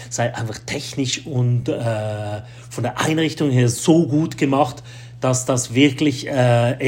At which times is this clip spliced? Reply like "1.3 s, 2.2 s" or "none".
none